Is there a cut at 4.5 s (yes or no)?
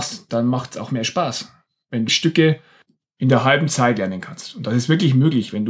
no